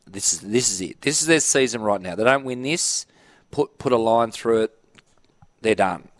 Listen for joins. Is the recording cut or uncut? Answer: uncut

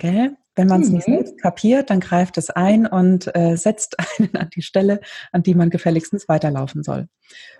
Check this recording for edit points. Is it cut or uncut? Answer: uncut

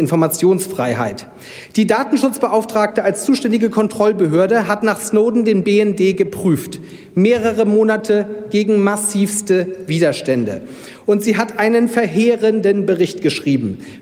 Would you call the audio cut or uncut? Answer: uncut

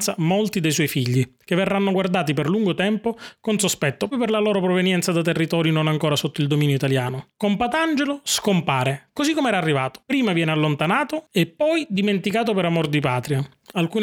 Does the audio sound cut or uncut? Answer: cut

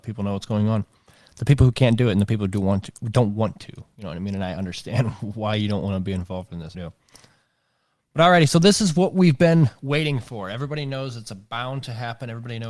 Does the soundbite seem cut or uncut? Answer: cut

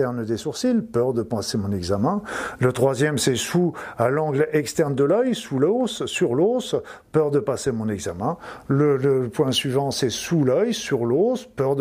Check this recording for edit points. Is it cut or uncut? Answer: uncut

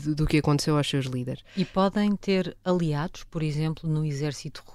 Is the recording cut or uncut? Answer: uncut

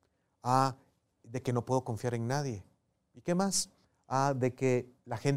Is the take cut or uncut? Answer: uncut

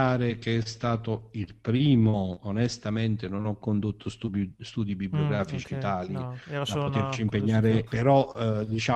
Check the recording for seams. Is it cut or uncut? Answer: cut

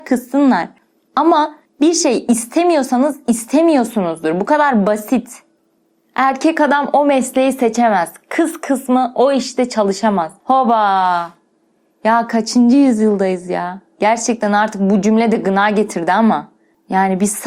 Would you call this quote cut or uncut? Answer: uncut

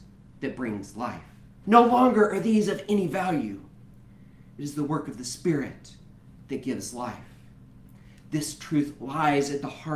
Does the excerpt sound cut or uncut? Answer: cut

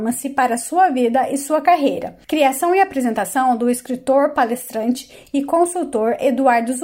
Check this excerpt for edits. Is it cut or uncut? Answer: cut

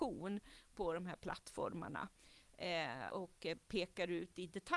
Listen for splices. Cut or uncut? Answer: cut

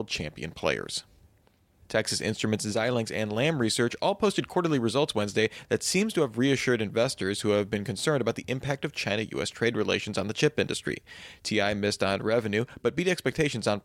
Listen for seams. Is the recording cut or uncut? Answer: uncut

